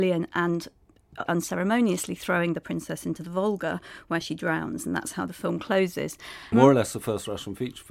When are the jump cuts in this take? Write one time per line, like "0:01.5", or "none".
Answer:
0:01.3
0:06.5

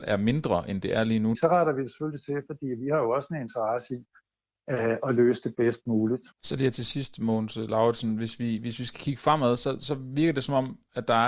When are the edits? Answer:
0:01.3
0:06.3

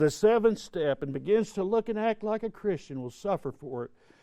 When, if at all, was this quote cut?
none

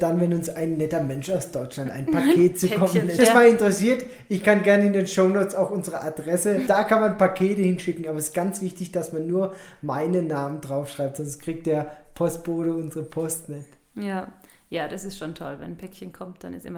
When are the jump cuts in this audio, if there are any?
0:03.2
0:06.7

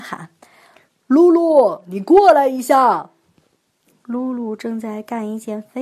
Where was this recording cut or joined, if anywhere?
none

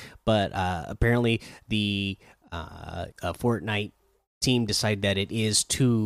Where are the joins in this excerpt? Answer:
0:03.1

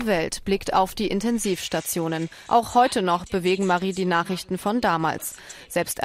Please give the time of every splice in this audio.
0:02.5

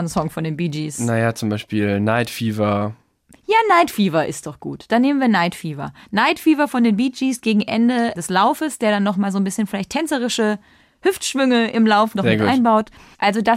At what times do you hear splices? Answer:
none

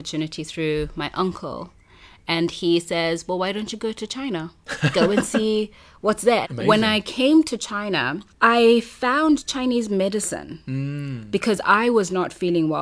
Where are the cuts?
0:06.4

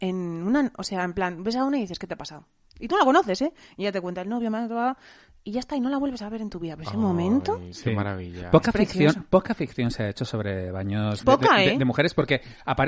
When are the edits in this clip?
0:11.2

